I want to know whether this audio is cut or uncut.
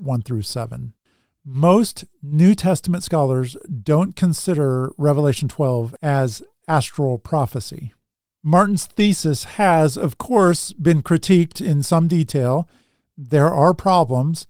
uncut